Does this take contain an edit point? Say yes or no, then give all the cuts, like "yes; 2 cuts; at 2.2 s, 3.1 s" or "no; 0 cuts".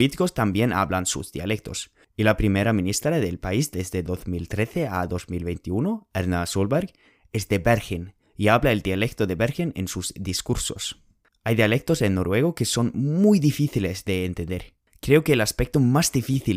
no; 0 cuts